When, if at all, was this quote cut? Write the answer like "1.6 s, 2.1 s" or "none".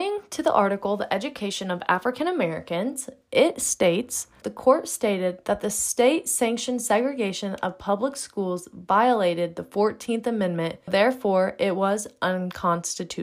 4.4 s, 10.9 s